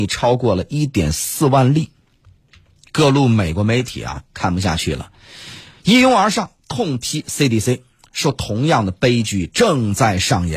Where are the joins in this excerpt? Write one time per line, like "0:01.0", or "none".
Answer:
none